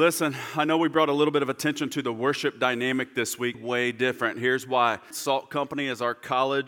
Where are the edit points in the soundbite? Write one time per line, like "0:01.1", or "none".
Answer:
0:03.5
0:05.1